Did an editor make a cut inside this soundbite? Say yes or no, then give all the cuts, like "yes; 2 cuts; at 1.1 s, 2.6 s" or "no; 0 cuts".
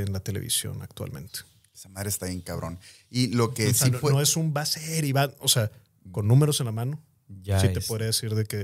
no; 0 cuts